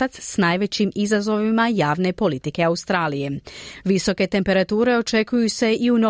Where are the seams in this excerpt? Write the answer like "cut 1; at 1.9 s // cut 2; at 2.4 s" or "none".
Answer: cut 1; at 3.8 s